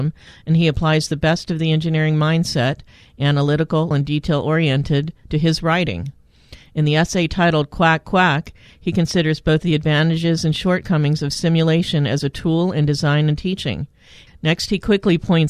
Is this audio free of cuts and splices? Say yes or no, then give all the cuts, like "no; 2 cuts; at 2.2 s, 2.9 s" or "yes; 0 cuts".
no; 2 cuts; at 3.9 s, 14.3 s